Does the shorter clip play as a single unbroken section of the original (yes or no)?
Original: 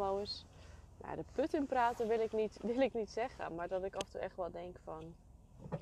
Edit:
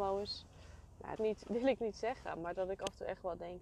no